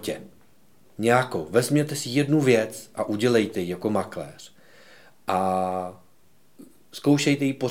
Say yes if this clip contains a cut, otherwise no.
no